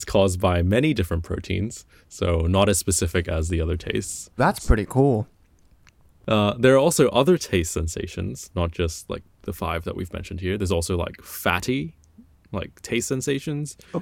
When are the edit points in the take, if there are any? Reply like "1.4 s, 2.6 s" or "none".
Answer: 4.4 s